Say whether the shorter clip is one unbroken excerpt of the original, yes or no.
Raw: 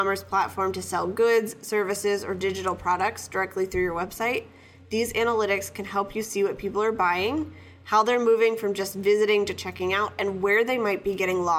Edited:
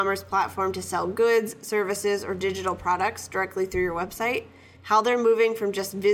no